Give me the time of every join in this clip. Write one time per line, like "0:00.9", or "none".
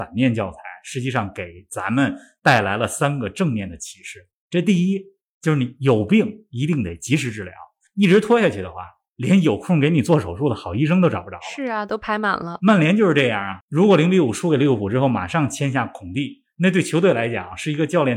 0:13.6